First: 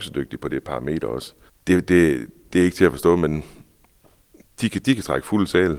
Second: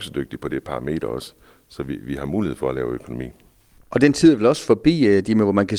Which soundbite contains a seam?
first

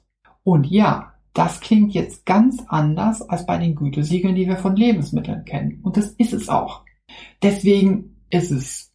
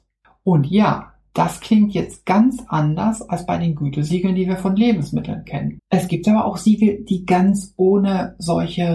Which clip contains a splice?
second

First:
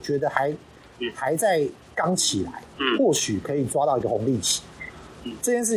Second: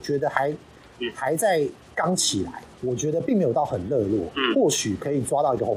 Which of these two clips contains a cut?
first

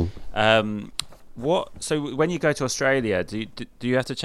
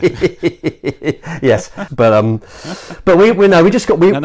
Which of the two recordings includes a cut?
second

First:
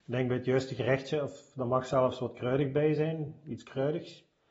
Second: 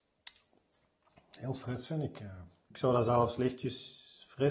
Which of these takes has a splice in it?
second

